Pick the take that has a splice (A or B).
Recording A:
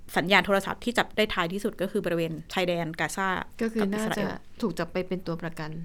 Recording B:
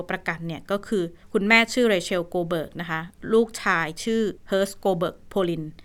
B